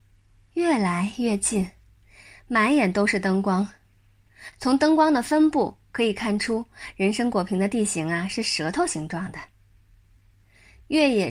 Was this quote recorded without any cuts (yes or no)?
yes